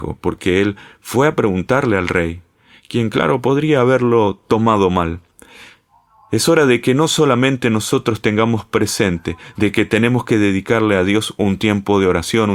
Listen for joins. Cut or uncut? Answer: uncut